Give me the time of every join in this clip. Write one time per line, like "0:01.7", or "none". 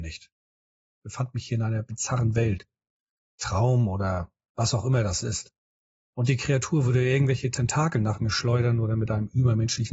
none